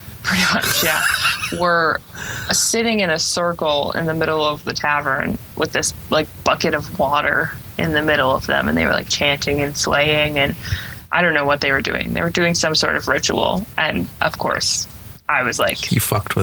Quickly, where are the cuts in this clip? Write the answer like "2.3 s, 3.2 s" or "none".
none